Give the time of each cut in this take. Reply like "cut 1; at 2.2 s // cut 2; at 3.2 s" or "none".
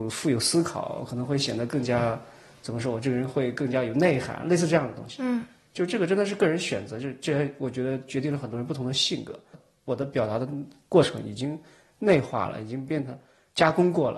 cut 1; at 9.5 s

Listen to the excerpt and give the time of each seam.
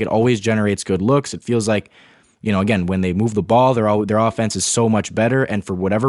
none

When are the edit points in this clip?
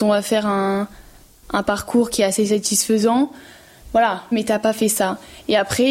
cut 1; at 4.3 s

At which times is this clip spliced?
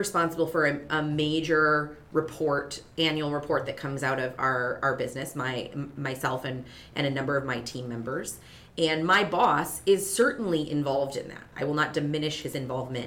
cut 1; at 11.5 s

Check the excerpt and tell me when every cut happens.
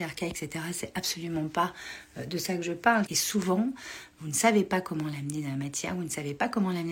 cut 1; at 3.1 s

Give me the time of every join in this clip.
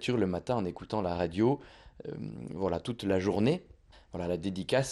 cut 1; at 3.9 s

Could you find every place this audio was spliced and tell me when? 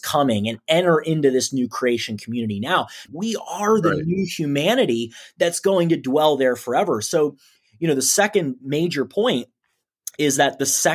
cut 1; at 3.1 s

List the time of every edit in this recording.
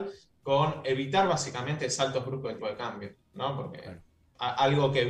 cut 1; at 2.6 s

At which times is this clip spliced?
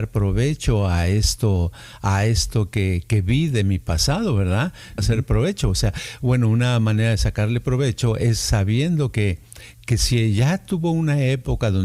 cut 1; at 5.0 s

